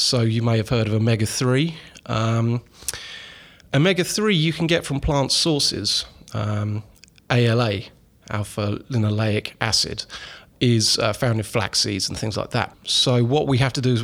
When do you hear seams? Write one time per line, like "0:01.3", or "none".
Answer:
0:12.7

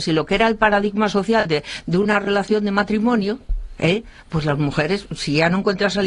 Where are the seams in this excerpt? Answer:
none

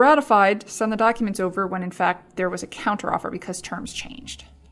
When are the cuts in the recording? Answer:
none

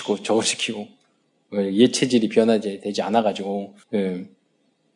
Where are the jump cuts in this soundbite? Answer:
0:03.8

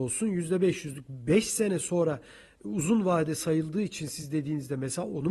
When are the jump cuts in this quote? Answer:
none

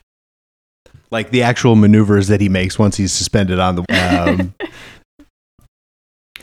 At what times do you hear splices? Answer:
0:03.8

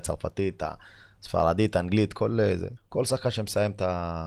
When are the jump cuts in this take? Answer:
0:02.8

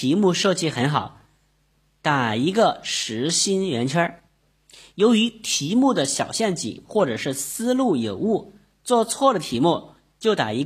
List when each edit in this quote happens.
none

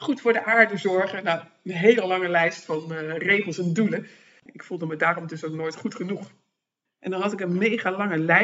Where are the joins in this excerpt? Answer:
0:04.4
0:06.9

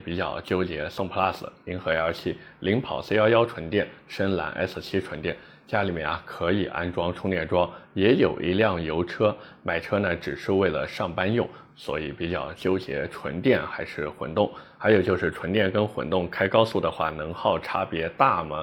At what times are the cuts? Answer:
none

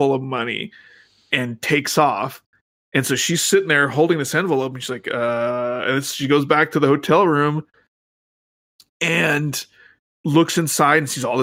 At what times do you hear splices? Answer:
none

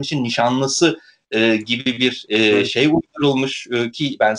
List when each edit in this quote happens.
none

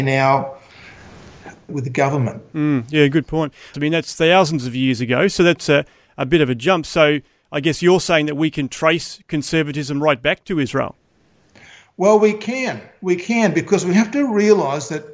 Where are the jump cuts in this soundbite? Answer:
0:01.7
0:03.7

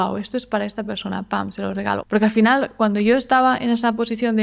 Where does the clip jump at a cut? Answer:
0:02.0

